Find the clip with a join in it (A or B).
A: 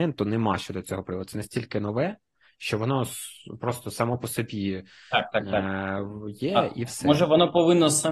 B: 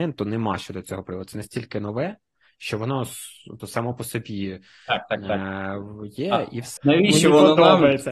B